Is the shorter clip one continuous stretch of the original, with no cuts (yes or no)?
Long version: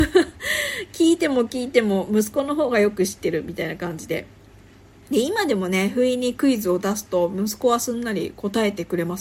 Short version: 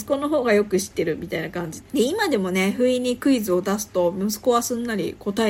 no